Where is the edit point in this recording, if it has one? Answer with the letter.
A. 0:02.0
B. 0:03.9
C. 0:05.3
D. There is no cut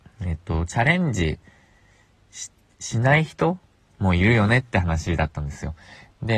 D